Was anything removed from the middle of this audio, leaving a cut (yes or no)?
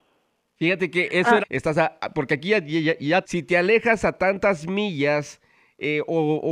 yes